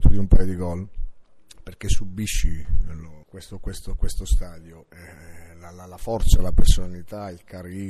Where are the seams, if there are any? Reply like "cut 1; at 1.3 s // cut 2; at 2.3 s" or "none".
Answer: none